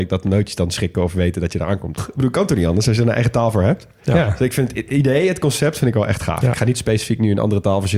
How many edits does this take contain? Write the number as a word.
one